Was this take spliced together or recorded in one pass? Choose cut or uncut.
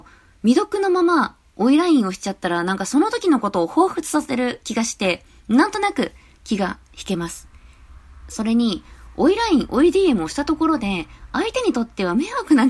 uncut